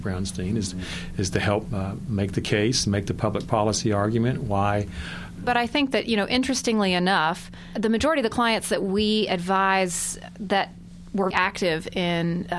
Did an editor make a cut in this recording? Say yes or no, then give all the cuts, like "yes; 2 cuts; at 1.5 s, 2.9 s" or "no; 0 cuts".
yes; 2 cuts; at 5.4 s, 11.3 s